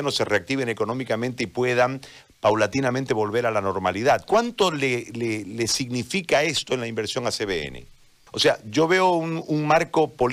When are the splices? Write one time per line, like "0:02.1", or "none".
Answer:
0:08.3

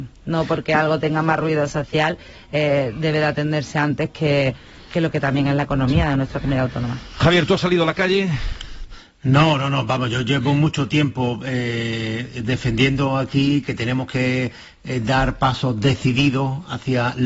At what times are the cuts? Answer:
none

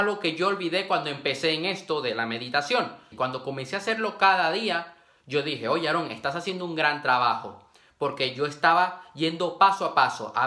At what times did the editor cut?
0:03.1

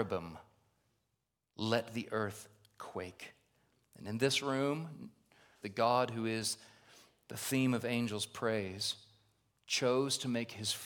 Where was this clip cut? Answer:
0:05.6

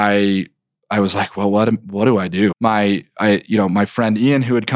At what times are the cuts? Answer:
0:02.5

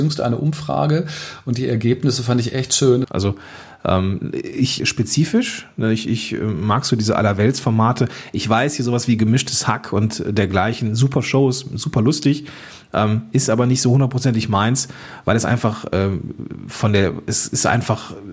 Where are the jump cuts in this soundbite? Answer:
0:03.0
0:04.8

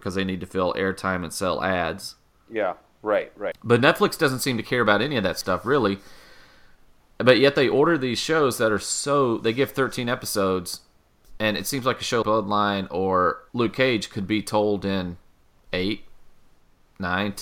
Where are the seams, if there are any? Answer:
0:03.5
0:12.2
0:13.5

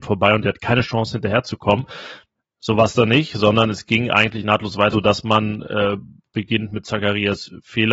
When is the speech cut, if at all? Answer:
0:02.4
0:04.9

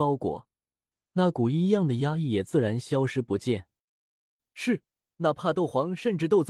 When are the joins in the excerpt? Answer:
0:05.1

